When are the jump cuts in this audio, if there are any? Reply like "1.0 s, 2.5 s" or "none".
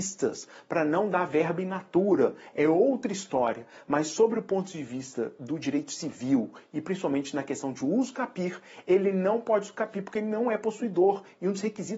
none